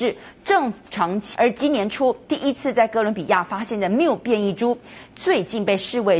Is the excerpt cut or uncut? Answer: cut